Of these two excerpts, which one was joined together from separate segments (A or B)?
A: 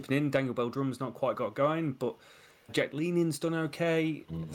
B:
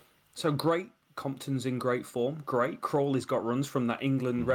A